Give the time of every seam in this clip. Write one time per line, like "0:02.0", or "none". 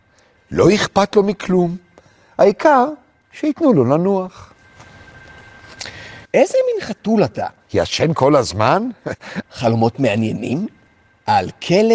0:06.3
0:07.6
0:09.4